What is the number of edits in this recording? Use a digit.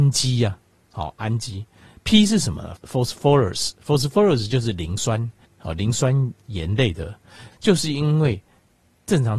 2